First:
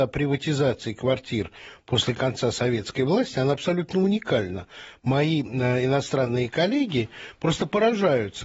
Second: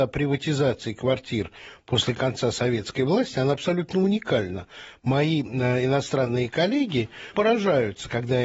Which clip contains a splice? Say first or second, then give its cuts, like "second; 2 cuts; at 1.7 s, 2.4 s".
second; 1 cut; at 7.3 s